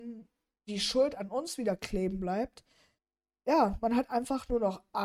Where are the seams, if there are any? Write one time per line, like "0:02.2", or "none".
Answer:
none